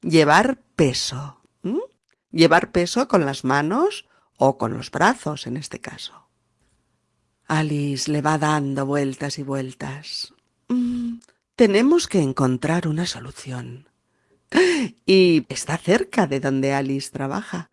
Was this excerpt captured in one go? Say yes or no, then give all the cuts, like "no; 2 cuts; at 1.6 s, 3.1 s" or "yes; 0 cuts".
no; 2 cuts; at 14.3 s, 15.4 s